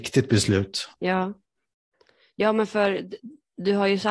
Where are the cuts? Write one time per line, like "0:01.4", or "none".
0:00.9